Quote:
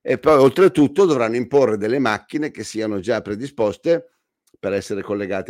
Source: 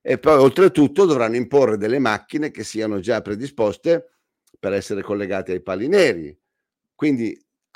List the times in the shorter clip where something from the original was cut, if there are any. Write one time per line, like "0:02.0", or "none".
none